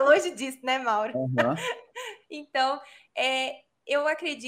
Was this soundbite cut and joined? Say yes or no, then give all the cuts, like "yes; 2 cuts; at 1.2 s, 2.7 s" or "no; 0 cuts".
no; 0 cuts